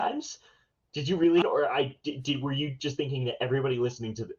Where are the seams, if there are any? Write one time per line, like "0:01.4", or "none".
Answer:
0:01.4